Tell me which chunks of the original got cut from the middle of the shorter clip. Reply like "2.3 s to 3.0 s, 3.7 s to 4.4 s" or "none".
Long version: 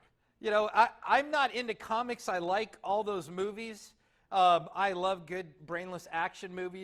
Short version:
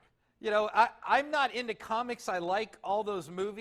none